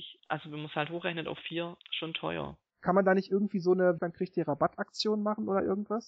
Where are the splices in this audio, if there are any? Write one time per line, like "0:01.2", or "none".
0:02.7
0:04.0